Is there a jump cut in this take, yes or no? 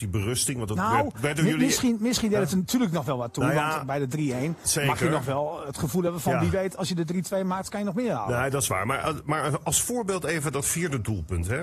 no